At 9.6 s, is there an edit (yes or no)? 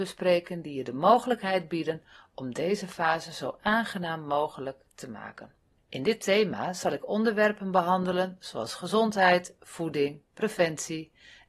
no